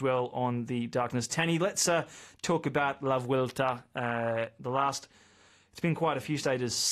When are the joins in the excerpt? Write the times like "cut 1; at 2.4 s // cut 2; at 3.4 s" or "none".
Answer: none